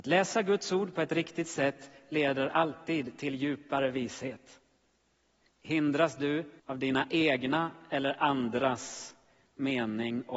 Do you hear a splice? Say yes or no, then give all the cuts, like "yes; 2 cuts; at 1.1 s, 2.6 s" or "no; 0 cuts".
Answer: yes; 2 cuts; at 5.5 s, 6.6 s